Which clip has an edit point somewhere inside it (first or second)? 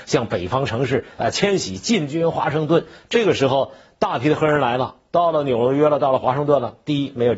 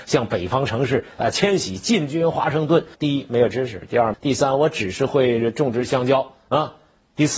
second